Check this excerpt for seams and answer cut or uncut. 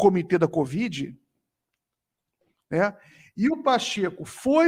uncut